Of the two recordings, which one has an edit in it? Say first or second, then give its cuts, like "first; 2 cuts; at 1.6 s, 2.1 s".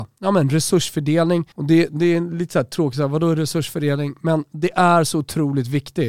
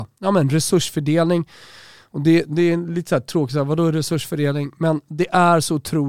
first; 1 cut; at 1.5 s